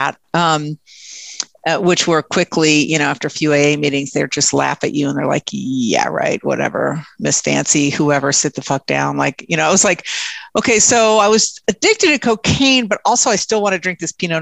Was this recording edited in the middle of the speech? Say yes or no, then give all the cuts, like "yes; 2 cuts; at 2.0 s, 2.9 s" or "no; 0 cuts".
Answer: no; 0 cuts